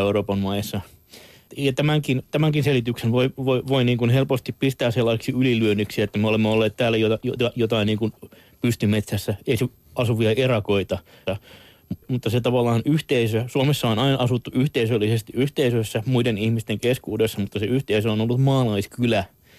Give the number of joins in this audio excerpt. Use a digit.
1